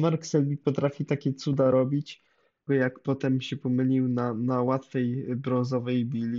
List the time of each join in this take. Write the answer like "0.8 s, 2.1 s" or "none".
2.7 s